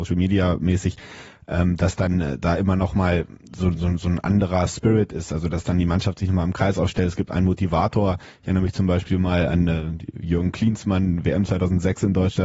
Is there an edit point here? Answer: no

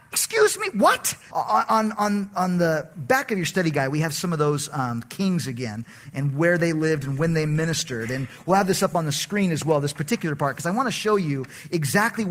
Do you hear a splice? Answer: yes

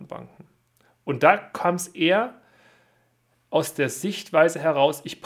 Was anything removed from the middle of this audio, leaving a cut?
no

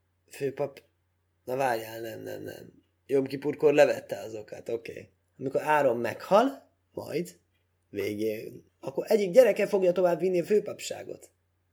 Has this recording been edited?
yes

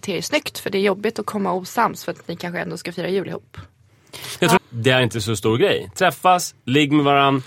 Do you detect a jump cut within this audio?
yes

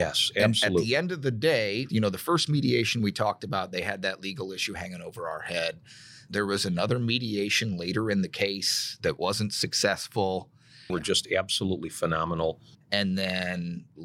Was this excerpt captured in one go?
no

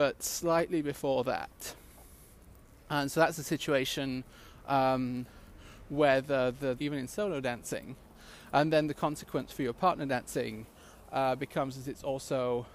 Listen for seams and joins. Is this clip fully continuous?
no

